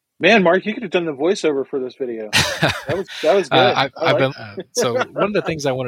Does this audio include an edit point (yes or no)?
yes